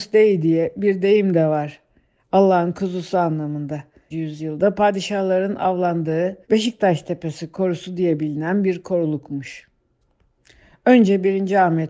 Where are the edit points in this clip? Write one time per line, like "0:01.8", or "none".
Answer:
0:04.1
0:06.4